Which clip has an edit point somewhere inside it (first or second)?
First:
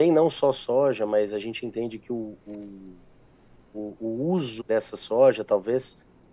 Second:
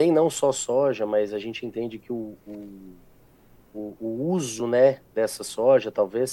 first